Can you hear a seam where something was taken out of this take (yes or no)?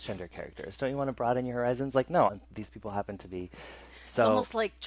yes